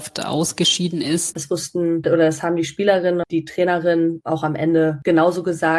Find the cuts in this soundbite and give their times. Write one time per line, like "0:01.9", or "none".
0:01.3
0:03.2